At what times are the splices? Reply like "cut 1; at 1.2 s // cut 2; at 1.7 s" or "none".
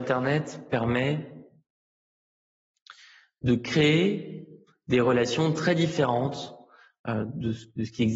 none